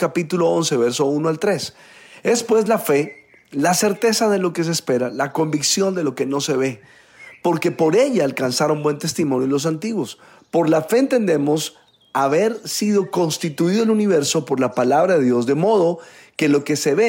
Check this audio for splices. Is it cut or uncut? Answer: uncut